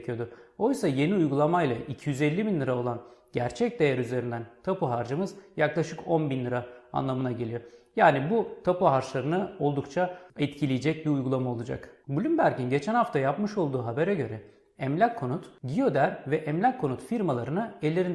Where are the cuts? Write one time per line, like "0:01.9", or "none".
0:12.0